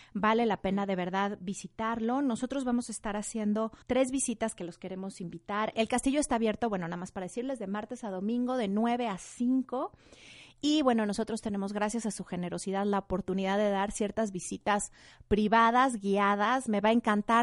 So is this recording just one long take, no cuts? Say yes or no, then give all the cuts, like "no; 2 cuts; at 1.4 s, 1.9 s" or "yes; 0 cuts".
no; 1 cut; at 3.8 s